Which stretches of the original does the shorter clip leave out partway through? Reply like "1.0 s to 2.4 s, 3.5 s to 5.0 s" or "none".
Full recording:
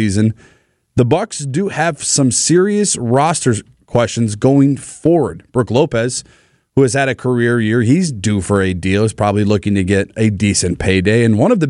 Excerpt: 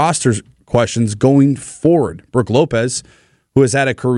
none